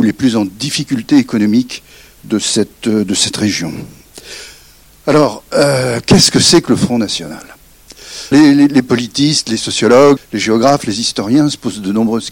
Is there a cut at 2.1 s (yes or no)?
no